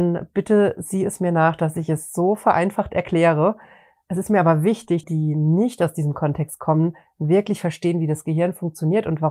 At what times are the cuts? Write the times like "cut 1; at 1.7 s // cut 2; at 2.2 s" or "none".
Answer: cut 1; at 5.0 s